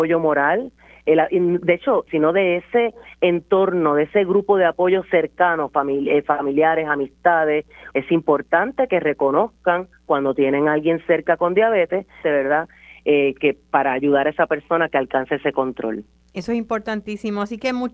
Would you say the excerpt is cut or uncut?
cut